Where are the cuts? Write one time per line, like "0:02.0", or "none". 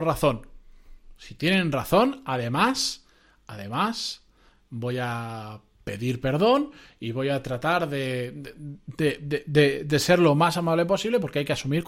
none